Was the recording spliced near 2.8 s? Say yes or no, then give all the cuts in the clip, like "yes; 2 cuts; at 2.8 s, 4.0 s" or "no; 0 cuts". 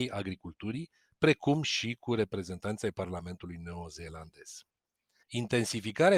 no; 1 cut; at 5.2 s